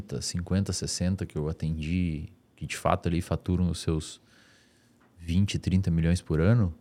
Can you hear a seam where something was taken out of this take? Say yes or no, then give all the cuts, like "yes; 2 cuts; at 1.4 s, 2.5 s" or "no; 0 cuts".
no; 0 cuts